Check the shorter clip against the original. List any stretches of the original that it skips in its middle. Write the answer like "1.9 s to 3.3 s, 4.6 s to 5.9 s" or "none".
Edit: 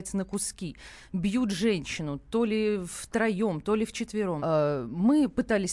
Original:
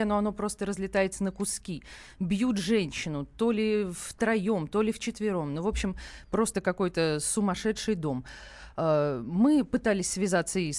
5.5 s to 8.7 s